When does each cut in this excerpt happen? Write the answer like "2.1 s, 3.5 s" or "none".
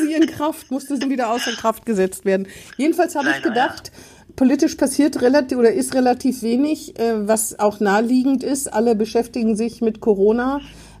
1.0 s